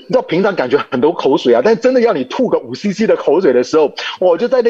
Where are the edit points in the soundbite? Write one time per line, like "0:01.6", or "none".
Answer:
none